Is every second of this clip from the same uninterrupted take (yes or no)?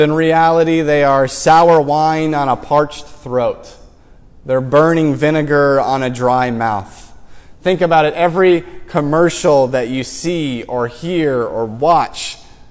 yes